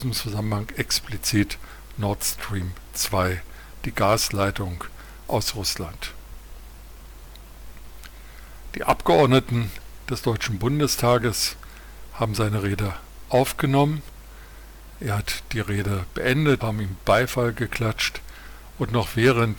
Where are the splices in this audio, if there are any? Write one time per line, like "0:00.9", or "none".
0:16.6